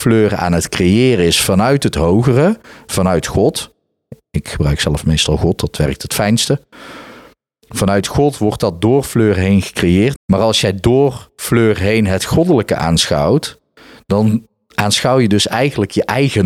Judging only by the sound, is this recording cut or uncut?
cut